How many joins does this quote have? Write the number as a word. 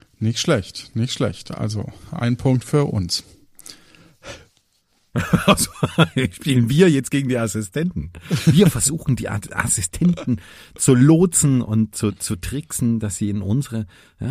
zero